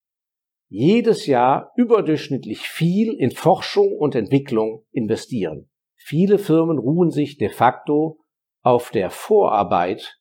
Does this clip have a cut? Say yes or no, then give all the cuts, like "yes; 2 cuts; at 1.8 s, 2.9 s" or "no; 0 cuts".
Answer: yes; 1 cut; at 5.8 s